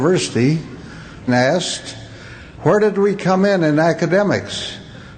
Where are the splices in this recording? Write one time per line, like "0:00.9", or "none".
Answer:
0:01.3